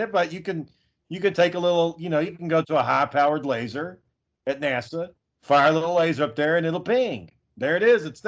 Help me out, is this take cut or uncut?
uncut